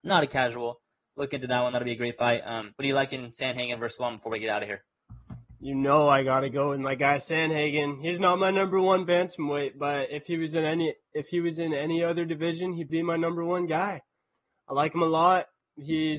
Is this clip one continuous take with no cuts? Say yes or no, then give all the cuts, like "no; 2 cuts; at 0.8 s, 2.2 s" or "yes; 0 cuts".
no; 2 cuts; at 2.7 s, 12.9 s